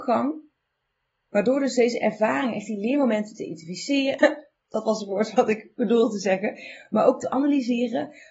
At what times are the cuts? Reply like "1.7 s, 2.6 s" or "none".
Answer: 4.2 s